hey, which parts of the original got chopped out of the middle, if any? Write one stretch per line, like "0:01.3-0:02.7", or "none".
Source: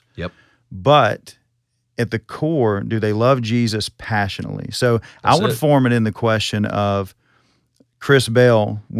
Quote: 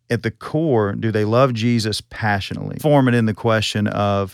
0:04.7-0:05.6